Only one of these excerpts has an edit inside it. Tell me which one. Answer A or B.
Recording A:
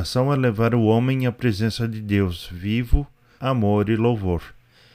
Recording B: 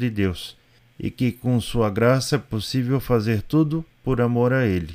A